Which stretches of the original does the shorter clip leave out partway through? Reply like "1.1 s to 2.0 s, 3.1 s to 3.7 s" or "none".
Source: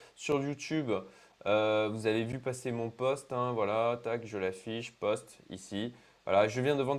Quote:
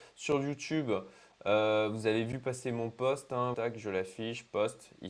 3.5 s to 4.0 s